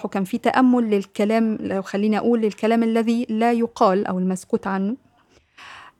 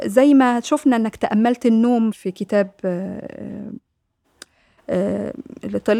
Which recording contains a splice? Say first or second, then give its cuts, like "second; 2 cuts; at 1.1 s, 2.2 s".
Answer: second; 1 cut; at 2.1 s